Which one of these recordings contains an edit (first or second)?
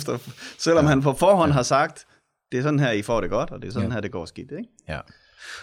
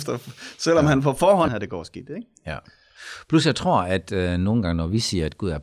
second